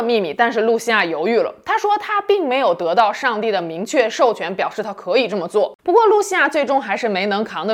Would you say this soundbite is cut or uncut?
cut